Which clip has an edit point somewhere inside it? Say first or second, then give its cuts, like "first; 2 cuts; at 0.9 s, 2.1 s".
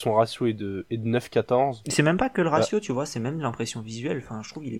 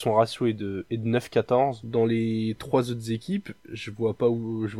second; 1 cut; at 1.8 s